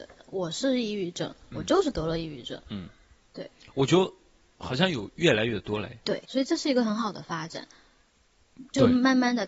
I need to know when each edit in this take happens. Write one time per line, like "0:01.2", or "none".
0:06.2